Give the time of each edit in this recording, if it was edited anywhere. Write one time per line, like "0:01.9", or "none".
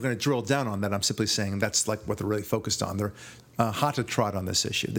0:03.4